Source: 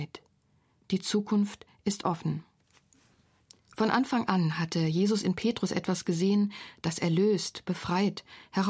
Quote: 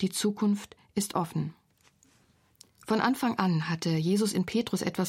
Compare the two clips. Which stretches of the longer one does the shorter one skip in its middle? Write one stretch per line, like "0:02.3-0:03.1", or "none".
none